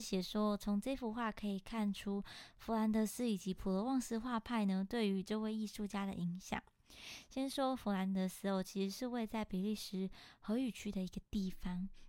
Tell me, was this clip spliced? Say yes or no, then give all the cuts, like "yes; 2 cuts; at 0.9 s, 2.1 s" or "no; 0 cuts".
no; 0 cuts